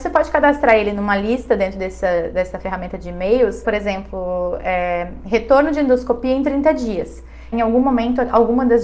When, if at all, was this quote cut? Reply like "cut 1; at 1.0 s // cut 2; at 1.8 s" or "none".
cut 1; at 3.6 s // cut 2; at 7.5 s